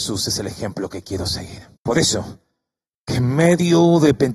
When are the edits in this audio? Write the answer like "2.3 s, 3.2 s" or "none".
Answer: 1.8 s